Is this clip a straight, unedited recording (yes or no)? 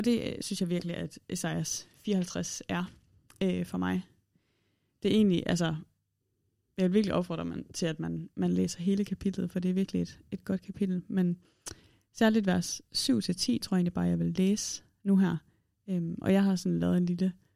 yes